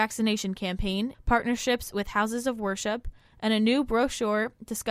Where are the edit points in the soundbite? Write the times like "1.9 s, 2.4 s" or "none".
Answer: 1.1 s